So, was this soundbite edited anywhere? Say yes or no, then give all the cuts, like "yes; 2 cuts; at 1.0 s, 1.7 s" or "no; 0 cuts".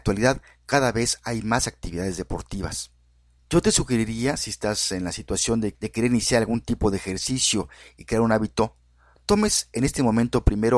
no; 0 cuts